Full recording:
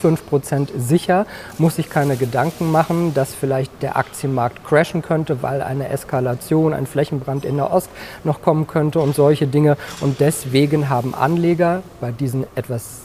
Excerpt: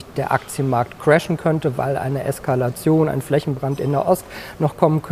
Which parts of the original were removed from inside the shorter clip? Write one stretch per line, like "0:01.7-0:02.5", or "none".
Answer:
none